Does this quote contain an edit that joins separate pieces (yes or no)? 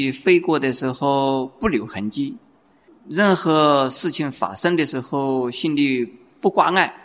yes